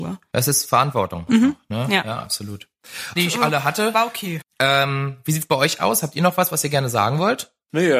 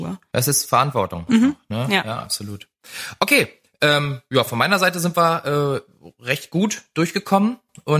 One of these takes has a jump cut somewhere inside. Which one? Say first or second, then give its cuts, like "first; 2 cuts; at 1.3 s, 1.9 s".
first; 2 cuts; at 3.2 s, 4.4 s